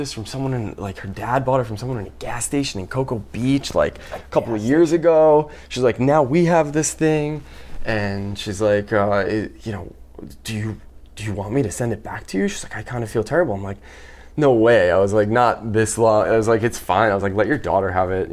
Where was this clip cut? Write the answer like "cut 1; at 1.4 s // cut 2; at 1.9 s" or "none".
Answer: none